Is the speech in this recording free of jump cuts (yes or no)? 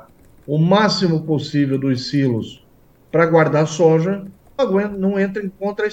no